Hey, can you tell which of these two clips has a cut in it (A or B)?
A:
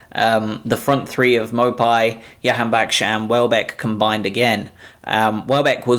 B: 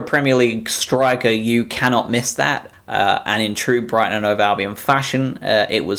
B